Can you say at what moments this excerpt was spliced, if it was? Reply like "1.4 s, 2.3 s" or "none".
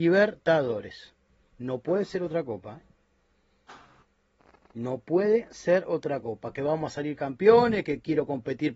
none